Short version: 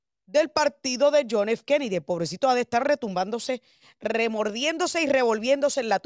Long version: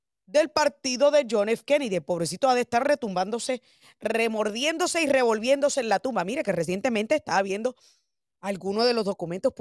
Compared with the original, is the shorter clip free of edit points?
yes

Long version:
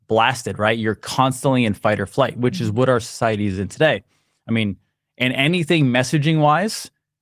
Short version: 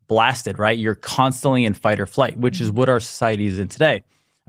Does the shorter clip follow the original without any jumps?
yes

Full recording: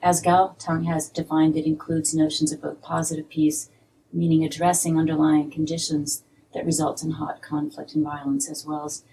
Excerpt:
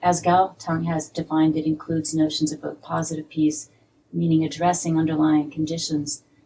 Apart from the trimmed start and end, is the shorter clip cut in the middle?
no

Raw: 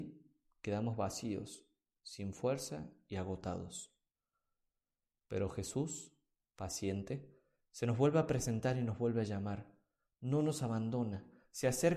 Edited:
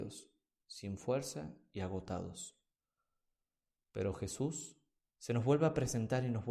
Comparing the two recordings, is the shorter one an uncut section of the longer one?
no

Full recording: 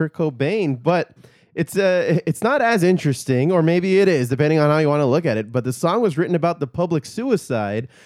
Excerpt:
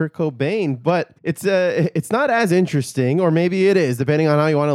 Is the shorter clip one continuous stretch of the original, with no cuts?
no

